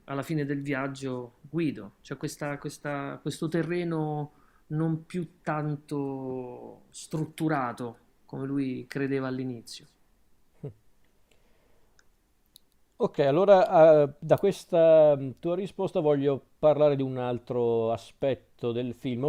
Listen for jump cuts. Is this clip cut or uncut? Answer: uncut